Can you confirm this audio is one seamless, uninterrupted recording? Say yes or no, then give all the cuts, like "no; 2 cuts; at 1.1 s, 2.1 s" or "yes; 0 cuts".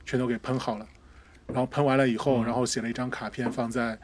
yes; 0 cuts